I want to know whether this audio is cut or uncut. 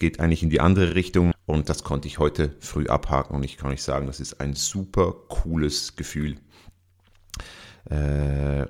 cut